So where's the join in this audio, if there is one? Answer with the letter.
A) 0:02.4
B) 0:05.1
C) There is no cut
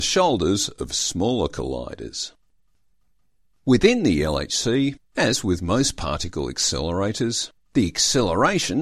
C